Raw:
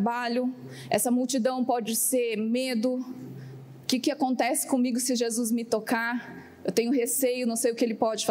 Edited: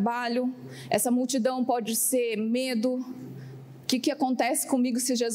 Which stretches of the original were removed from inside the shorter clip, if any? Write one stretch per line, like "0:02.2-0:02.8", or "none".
none